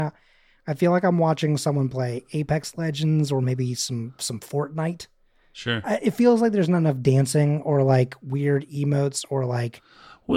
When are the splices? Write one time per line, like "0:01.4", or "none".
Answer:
none